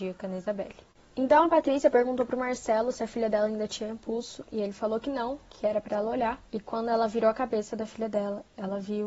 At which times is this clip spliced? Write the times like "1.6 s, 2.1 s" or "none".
6.5 s